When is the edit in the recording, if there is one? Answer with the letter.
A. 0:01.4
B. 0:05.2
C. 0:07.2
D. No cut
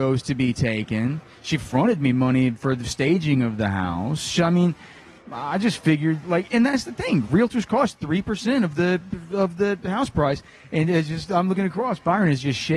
D